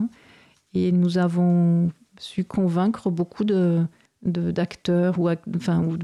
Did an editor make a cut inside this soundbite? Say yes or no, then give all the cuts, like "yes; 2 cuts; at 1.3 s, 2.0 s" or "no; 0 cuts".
no; 0 cuts